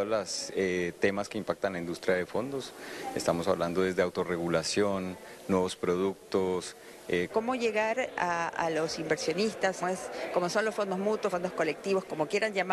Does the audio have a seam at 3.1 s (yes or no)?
no